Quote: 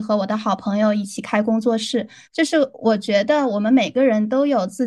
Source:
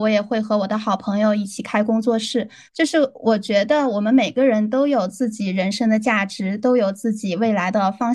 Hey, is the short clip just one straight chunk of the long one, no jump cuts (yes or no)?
yes